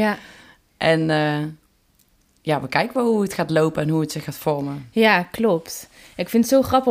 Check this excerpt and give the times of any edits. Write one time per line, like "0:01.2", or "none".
none